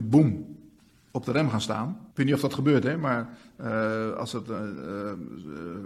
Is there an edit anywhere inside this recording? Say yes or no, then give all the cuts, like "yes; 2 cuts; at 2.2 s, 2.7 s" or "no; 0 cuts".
yes; 1 cut; at 2.1 s